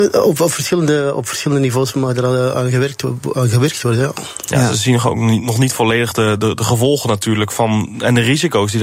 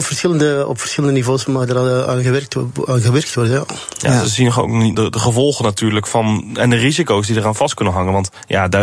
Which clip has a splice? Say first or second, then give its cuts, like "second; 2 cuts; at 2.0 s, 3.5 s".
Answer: second; 1 cut; at 4.9 s